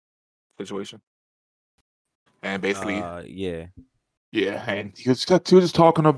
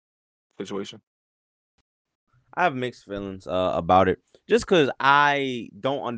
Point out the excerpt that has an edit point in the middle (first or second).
first